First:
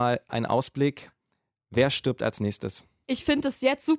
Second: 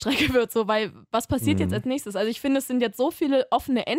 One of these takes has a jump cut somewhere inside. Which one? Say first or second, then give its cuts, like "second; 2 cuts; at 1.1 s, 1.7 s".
first; 1 cut; at 3.0 s